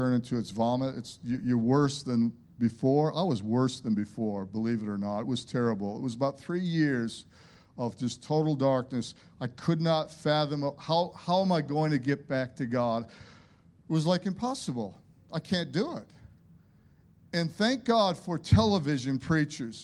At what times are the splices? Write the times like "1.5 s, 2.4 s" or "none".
none